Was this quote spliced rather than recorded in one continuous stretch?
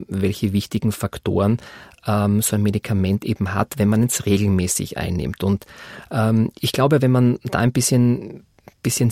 no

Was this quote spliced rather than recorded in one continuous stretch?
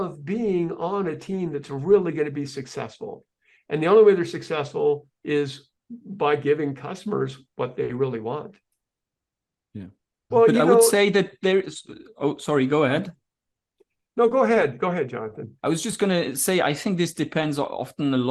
yes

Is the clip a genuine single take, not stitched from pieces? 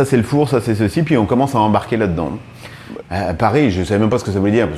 no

